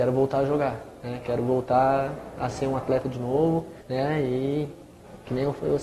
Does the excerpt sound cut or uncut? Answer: cut